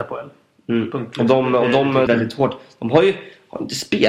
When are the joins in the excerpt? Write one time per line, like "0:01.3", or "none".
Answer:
0:02.1